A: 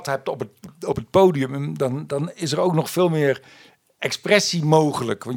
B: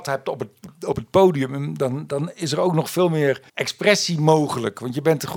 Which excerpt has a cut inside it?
B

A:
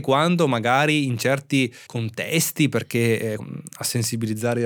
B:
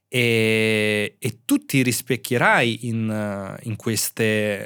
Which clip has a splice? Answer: A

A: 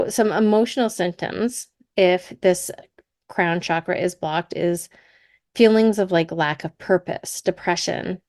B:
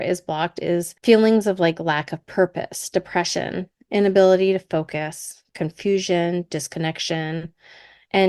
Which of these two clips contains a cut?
B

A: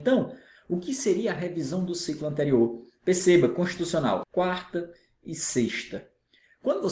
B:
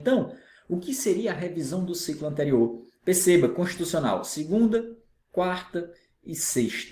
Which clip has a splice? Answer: A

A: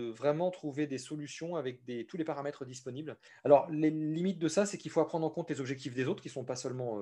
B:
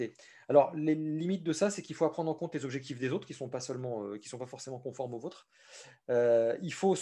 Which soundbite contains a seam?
A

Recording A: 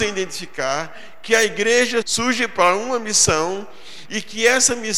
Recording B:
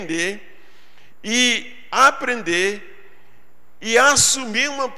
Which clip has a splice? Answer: A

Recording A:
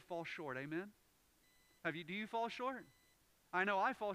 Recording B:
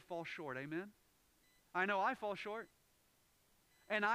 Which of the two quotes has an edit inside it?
B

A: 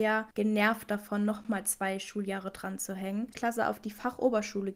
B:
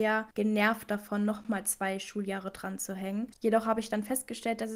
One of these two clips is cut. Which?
A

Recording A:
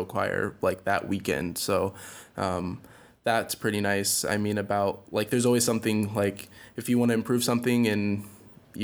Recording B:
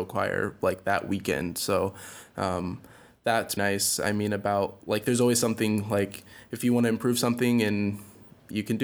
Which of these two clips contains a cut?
B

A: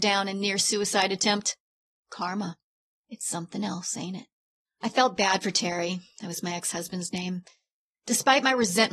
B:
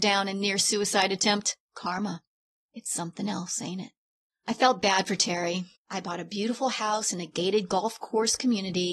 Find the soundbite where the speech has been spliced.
B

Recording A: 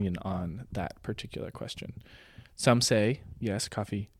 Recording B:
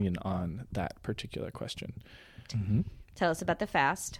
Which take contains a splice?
B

